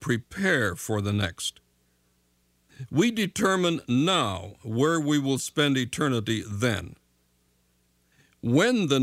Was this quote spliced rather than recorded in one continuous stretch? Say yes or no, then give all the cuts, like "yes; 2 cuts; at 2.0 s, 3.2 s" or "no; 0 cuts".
no; 0 cuts